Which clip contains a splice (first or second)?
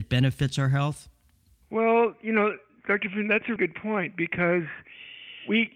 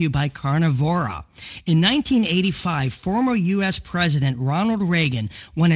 first